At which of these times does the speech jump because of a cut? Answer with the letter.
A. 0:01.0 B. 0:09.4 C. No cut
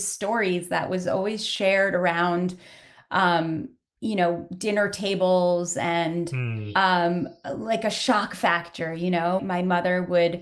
B